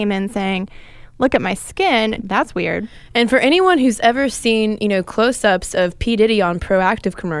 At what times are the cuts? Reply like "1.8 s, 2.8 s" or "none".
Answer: 2.2 s

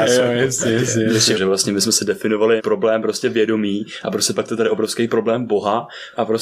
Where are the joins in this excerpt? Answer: 1.3 s, 2.6 s

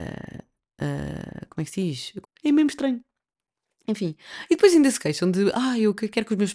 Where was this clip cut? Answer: 2.2 s

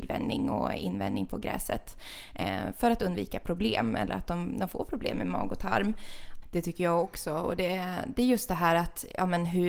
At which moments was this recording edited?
6.4 s

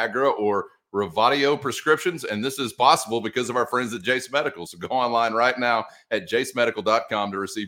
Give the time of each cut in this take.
none

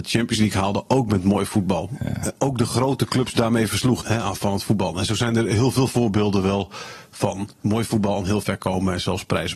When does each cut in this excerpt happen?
4.0 s, 7.5 s

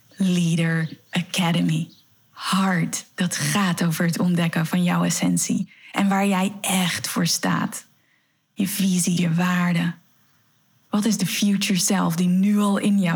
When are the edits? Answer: 9.2 s

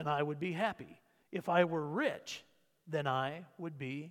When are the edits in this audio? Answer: 1.2 s

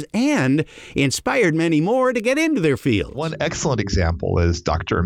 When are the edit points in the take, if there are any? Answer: none

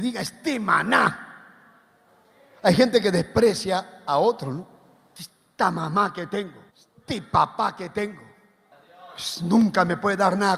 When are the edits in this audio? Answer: 6.7 s

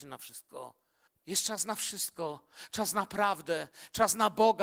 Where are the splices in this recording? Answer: 1.1 s

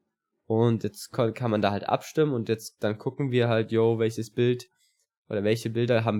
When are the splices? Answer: none

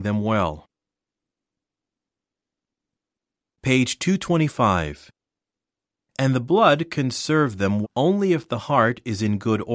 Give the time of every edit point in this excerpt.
7.8 s

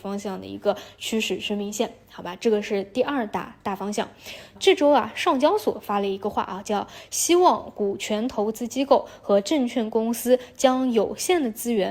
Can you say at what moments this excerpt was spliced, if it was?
4.5 s

